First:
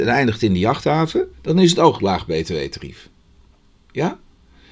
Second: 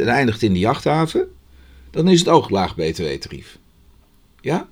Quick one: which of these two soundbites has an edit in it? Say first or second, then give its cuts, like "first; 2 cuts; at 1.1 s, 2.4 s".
first; 1 cut; at 1.3 s